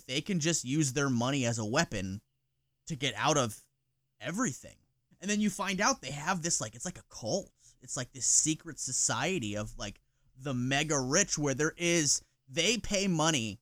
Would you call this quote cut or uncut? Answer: cut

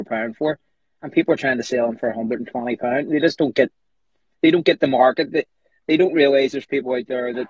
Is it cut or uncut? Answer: uncut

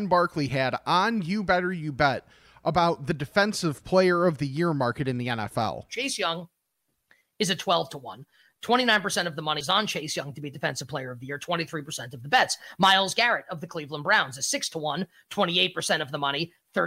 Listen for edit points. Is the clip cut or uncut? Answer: uncut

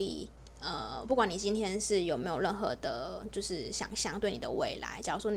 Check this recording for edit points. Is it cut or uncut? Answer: uncut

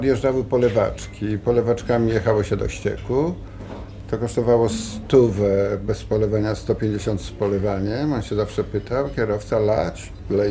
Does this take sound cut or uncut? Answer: uncut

